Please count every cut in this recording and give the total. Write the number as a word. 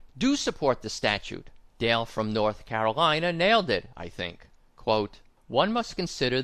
one